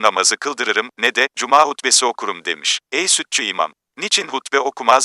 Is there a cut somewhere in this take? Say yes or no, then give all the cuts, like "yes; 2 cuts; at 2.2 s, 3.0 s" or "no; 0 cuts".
yes; 1 cut; at 2.8 s